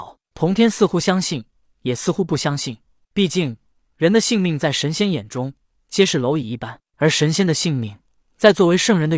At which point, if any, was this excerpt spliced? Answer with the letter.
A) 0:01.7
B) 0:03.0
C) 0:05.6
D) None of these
B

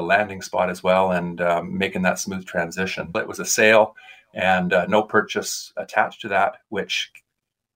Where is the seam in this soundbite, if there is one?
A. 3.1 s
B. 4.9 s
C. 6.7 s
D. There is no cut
A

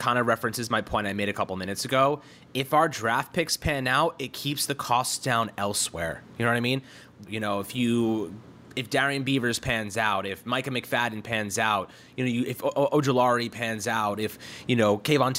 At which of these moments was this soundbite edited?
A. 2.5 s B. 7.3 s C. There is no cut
B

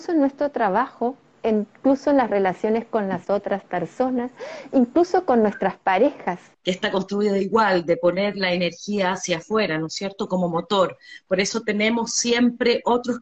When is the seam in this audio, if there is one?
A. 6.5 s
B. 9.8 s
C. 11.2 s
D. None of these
A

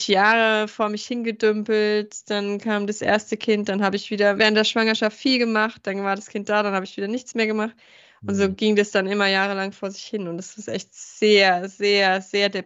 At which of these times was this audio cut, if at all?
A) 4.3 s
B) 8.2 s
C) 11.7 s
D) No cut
A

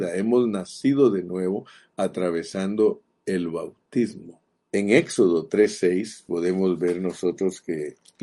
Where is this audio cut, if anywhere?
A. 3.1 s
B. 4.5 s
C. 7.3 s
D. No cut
B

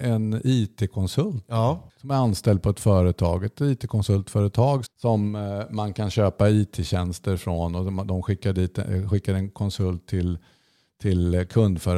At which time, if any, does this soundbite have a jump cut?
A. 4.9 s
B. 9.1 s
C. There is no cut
A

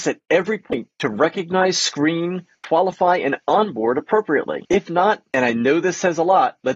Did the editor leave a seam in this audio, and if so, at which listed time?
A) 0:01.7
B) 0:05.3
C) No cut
C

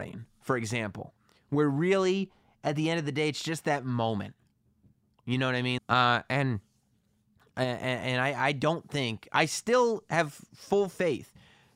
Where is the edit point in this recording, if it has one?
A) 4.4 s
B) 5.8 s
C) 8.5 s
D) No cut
B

